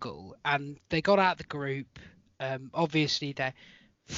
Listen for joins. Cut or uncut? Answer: uncut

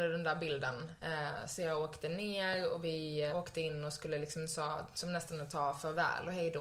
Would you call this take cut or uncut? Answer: cut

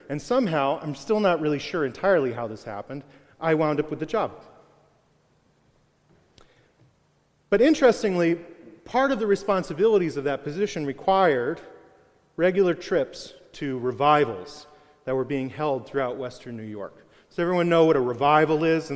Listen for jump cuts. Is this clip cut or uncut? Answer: uncut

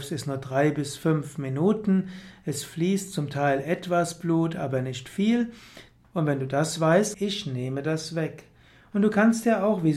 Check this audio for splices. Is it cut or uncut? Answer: cut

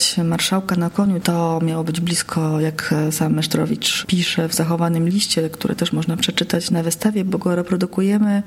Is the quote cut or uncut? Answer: cut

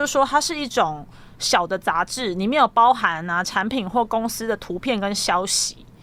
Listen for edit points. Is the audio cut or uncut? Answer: uncut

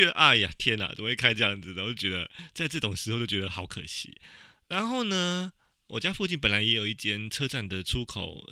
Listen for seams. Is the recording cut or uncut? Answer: uncut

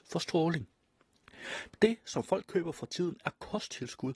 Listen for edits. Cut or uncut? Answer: cut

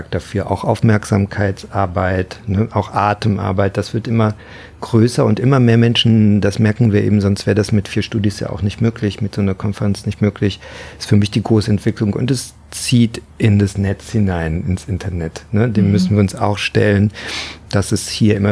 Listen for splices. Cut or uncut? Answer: cut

